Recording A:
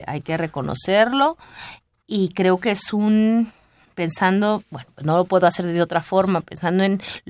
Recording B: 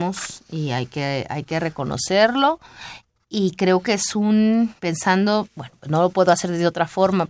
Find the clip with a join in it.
B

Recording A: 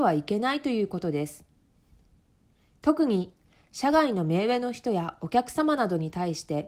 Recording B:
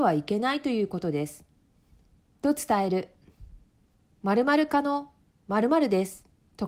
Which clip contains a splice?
B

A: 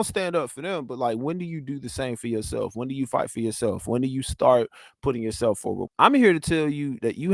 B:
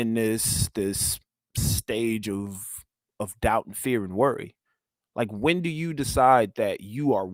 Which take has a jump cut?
A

